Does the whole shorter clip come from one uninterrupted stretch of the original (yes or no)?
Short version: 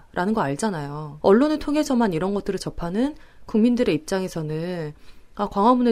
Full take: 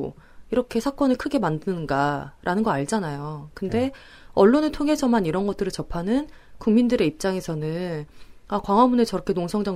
no